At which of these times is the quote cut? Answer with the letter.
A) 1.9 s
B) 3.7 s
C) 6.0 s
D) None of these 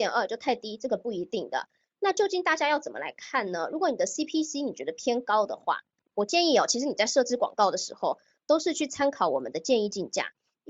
D